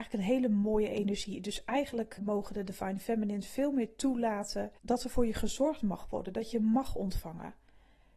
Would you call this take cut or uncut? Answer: cut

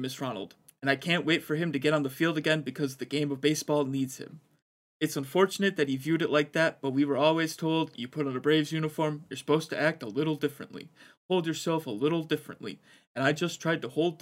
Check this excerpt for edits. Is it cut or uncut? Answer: uncut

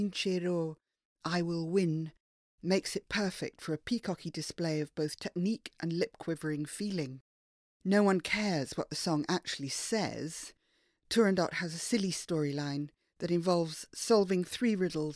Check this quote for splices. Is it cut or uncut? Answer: uncut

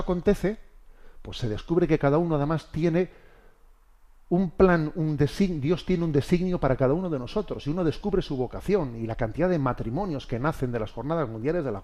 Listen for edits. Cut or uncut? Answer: uncut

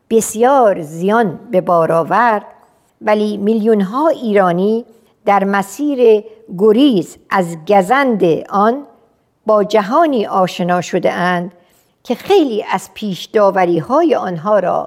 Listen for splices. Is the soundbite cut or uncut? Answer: uncut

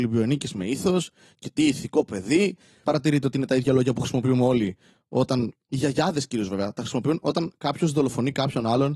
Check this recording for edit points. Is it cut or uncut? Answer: uncut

